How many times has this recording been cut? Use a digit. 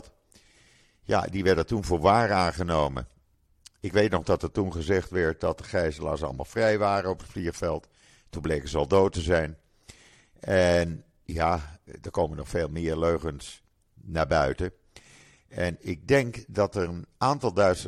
1